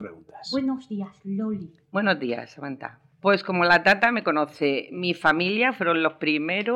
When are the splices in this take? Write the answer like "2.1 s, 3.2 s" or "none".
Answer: 3.1 s